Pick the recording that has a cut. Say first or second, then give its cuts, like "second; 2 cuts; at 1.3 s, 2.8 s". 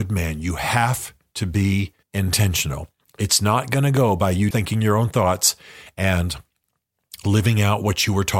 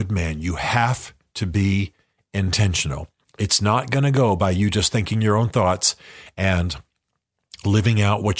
first; 2 cuts; at 2.0 s, 4.5 s